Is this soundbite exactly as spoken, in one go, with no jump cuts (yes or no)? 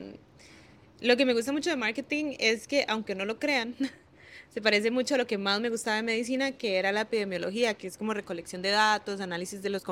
yes